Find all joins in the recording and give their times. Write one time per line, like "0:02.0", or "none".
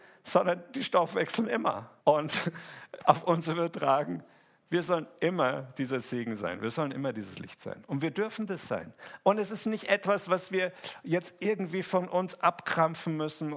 0:02.0